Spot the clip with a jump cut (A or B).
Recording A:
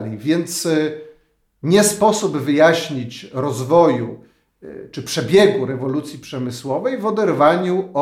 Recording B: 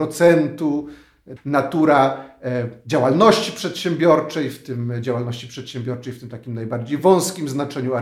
B